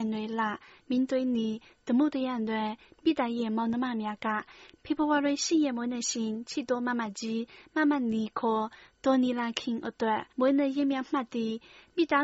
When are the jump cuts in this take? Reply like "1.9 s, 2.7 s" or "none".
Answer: 10.3 s